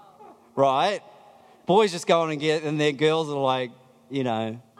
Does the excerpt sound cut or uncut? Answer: uncut